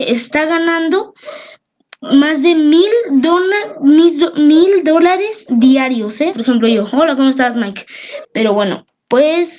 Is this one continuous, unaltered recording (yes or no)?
no